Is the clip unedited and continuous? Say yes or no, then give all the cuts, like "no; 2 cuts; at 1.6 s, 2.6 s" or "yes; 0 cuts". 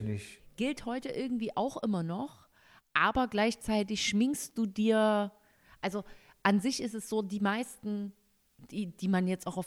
yes; 0 cuts